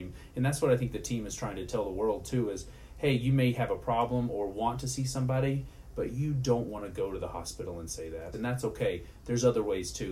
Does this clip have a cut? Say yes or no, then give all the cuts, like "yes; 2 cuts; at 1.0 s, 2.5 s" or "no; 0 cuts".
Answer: yes; 1 cut; at 8.3 s